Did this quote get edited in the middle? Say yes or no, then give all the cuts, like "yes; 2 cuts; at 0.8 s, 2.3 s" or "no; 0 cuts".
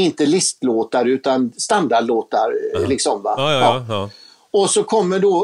no; 0 cuts